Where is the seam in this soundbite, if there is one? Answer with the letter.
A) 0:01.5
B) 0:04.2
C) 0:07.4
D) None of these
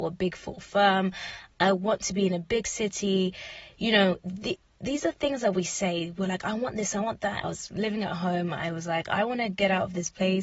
C